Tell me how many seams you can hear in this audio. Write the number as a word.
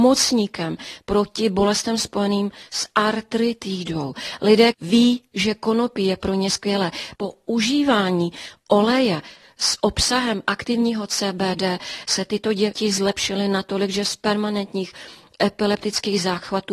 two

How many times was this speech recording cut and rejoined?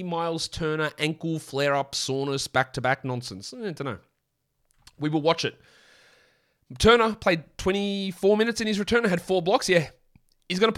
zero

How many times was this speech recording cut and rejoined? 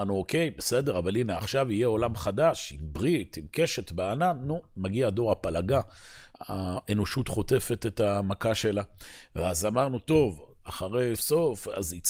three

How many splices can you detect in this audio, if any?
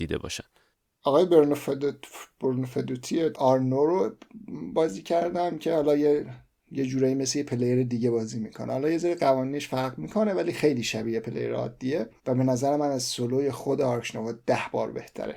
two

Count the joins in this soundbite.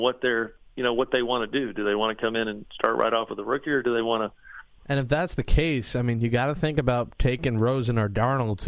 one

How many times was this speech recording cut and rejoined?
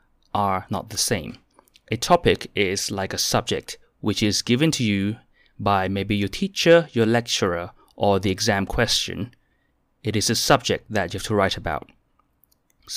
zero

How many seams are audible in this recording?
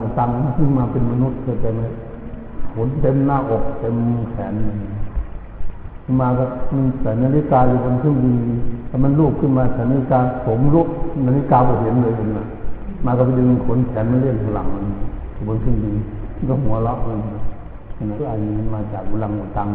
one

